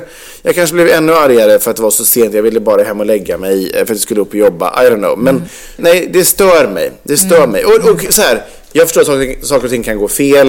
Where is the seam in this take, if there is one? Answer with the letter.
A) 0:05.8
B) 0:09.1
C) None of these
A